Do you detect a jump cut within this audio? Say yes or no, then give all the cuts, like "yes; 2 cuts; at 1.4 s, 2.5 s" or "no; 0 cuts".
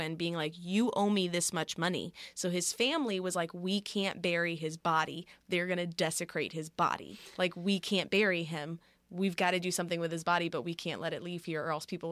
no; 0 cuts